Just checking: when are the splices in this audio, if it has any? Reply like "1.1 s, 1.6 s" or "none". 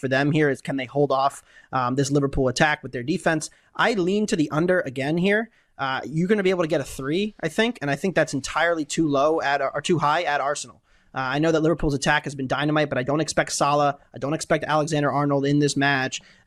none